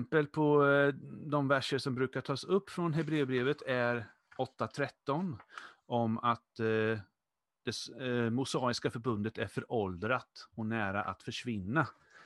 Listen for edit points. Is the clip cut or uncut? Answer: uncut